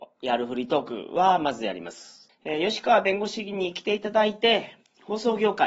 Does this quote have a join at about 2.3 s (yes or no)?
yes